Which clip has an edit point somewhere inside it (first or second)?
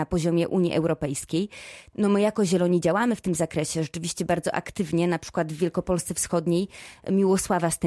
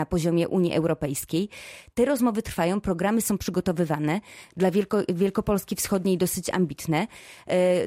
first